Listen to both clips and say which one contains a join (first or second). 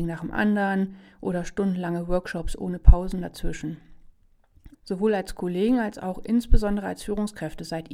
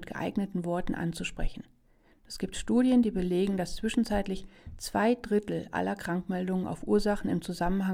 first